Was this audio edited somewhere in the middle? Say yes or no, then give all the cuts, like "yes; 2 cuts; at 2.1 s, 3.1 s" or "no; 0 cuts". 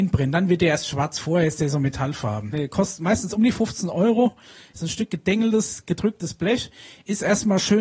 yes; 1 cut; at 2.5 s